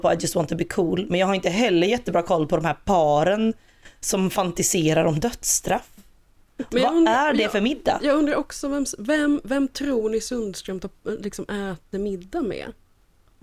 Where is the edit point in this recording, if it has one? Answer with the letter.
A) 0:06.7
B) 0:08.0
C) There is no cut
A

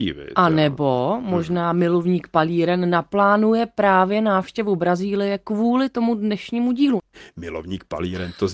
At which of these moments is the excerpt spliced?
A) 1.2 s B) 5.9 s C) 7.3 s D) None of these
D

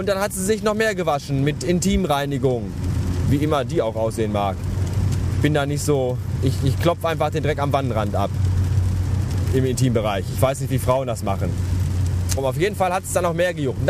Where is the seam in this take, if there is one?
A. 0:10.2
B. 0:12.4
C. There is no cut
B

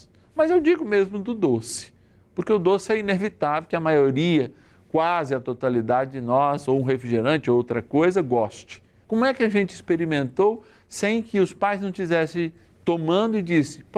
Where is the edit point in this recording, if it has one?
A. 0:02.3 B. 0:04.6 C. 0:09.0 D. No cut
C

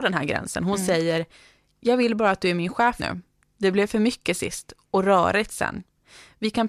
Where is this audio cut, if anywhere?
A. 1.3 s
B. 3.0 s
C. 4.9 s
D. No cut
B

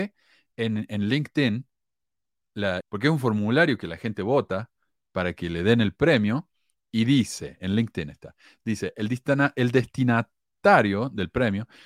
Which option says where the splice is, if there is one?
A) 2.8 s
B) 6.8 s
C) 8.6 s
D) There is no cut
A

